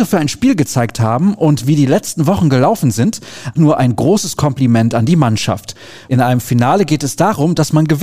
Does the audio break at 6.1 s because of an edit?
yes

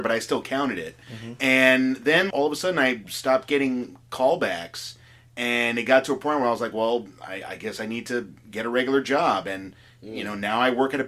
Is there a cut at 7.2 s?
no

